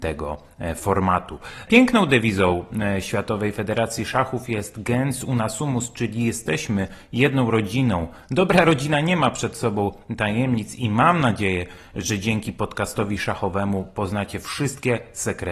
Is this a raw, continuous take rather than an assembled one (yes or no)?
yes